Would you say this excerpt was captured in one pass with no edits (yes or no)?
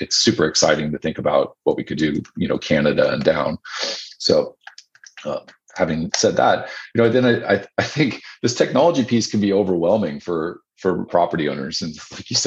no